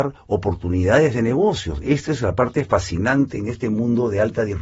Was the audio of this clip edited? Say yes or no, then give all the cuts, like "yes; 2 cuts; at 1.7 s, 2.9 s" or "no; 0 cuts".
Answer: no; 0 cuts